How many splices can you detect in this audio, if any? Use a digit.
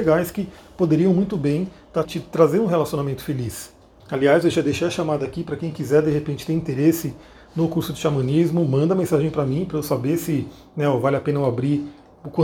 2